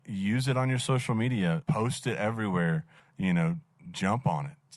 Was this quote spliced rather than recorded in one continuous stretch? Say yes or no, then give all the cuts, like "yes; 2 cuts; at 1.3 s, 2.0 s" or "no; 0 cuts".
yes; 2 cuts; at 1.6 s, 3.0 s